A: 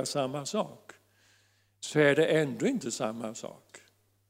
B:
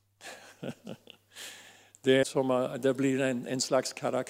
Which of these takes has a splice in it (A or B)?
B